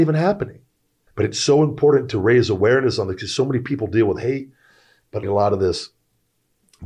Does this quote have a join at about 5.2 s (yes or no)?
yes